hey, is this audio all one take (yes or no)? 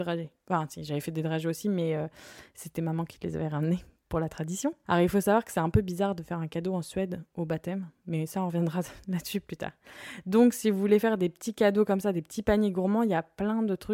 no